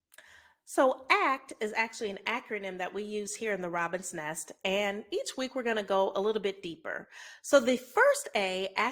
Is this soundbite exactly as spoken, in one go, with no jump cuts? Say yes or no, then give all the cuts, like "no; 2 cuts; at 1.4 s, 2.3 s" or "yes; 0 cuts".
yes; 0 cuts